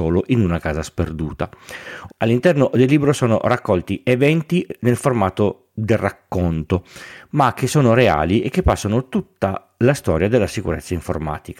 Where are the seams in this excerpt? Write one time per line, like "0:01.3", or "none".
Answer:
0:02.1